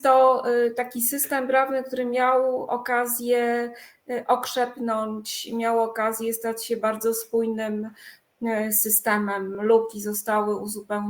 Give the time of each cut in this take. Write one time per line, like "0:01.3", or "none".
none